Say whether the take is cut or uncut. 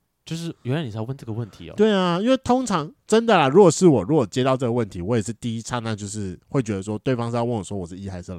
uncut